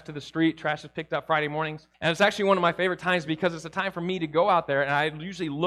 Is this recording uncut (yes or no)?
no